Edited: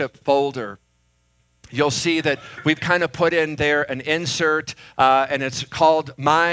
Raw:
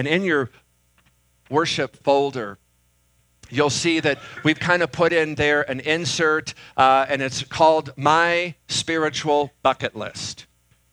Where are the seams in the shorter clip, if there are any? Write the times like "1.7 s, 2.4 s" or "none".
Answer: none